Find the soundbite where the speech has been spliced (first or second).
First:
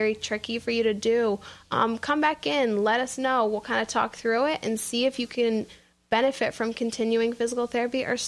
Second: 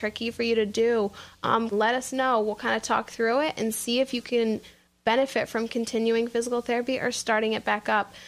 second